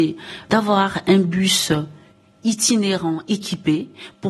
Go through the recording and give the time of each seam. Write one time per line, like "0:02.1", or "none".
none